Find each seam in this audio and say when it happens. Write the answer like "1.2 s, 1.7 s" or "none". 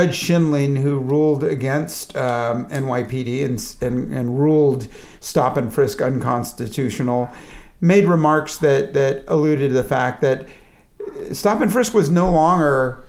none